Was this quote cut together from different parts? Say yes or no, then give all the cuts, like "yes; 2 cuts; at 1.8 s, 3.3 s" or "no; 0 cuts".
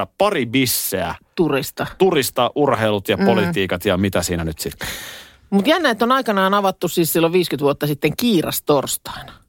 no; 0 cuts